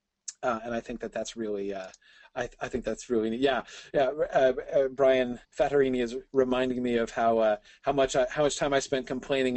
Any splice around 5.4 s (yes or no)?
yes